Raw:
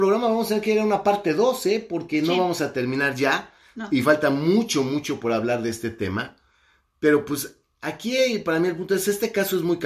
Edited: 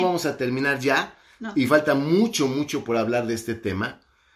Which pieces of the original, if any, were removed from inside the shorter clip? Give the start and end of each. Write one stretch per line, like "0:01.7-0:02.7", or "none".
none